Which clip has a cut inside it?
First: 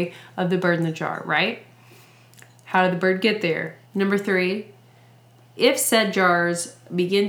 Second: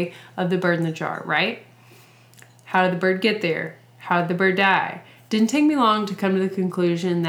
first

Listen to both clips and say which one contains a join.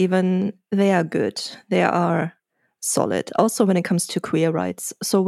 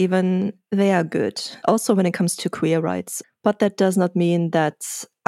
second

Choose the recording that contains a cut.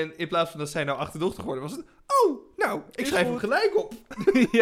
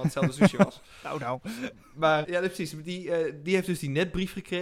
second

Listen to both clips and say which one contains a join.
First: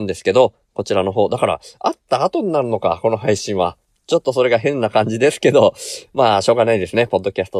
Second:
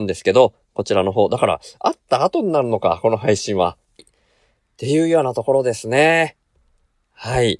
second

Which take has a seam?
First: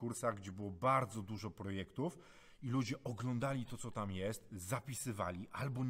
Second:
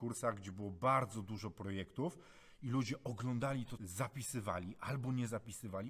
second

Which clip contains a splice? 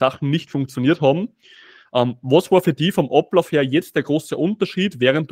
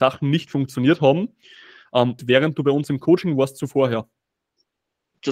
second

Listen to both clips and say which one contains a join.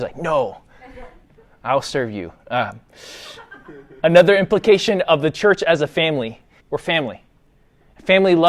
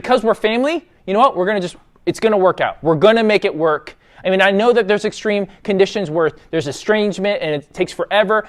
first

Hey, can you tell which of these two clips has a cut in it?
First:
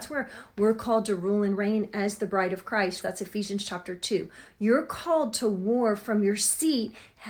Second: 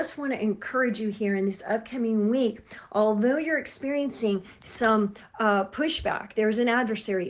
first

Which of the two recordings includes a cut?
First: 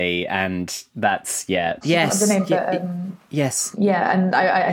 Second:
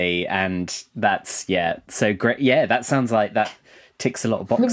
first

